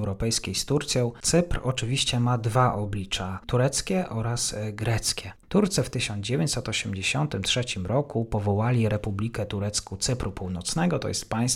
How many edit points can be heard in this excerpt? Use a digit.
0